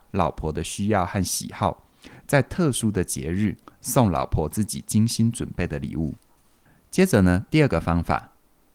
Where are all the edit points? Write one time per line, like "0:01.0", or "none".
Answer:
none